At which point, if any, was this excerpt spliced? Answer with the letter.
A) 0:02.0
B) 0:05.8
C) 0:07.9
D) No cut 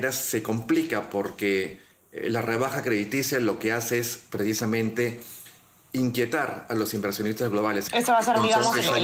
C